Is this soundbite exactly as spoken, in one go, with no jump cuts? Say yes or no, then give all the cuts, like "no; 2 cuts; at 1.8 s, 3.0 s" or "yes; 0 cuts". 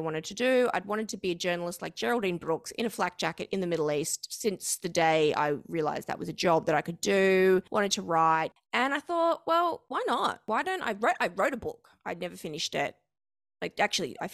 yes; 0 cuts